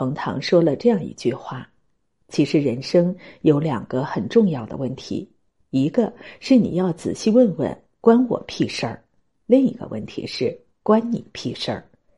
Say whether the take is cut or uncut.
uncut